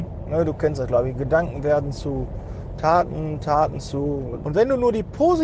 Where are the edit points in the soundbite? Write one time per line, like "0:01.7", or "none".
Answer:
0:04.4